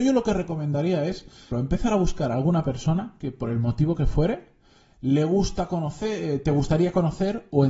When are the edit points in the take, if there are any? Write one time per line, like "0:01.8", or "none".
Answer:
0:01.5